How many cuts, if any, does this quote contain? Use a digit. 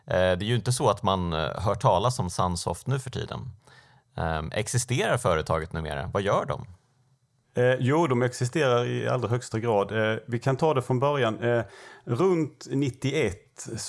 0